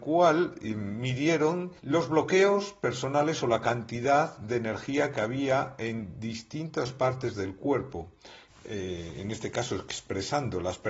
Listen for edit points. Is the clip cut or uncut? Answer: cut